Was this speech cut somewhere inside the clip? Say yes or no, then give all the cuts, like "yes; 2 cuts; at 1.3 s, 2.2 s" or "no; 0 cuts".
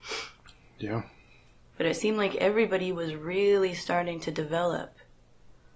yes; 1 cut; at 1.7 s